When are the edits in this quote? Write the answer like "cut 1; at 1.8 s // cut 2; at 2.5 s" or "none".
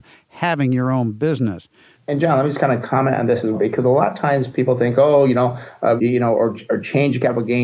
cut 1; at 1.9 s // cut 2; at 3.5 s // cut 3; at 6.0 s